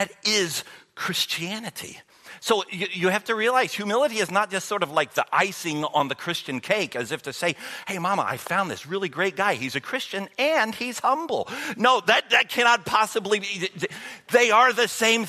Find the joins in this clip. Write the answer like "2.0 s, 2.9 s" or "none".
none